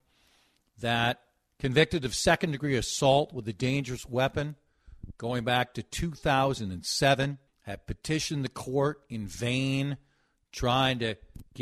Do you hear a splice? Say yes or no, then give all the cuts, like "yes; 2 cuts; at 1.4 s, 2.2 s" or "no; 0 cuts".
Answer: yes; 1 cut; at 7.5 s